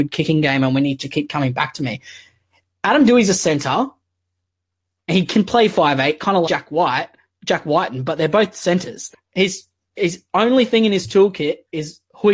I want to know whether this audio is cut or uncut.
cut